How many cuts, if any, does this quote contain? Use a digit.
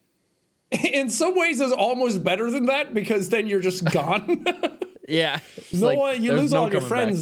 1